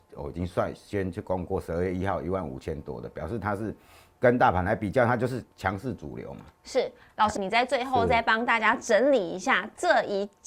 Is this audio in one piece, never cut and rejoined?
no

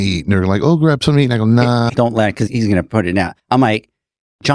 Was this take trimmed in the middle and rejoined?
yes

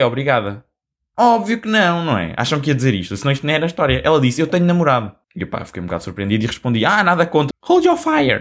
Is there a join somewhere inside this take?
yes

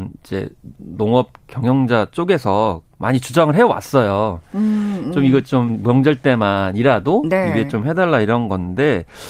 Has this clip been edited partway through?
no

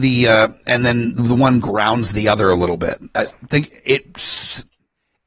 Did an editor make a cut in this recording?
yes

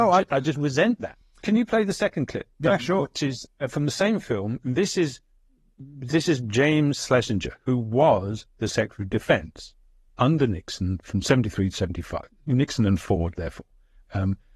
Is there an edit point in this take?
no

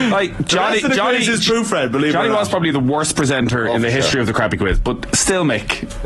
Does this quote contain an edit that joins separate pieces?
no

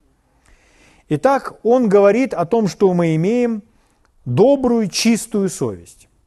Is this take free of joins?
yes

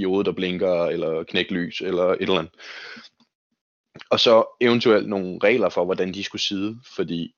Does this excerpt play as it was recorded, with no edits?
yes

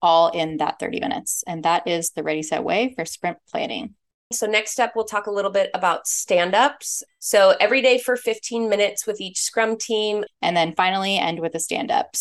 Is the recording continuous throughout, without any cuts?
no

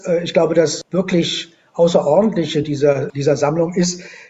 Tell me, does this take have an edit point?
no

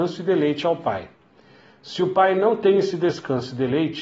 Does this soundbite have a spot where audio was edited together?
no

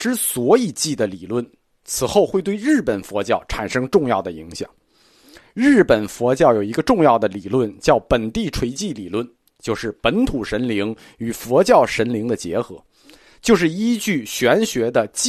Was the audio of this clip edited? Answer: no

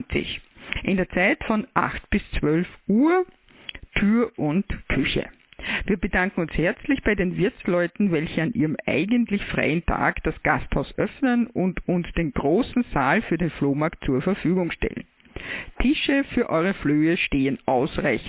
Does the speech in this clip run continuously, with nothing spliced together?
yes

